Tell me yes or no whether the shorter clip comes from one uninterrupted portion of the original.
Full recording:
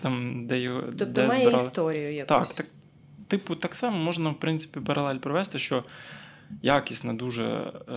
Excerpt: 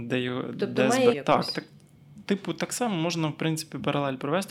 no